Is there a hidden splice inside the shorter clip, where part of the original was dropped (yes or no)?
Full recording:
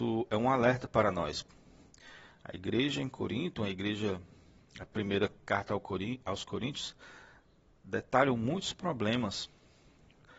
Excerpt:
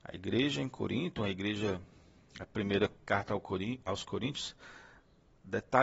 no